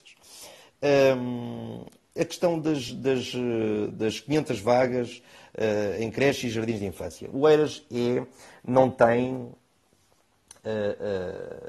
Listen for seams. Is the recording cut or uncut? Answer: uncut